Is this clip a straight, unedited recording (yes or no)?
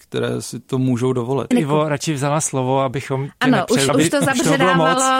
no